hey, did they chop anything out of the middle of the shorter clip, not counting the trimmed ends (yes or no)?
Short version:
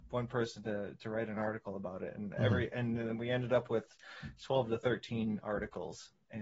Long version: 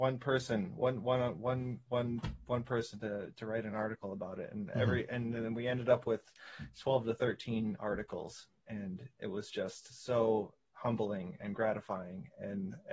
no